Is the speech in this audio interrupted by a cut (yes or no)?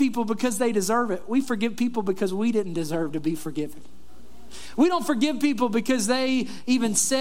no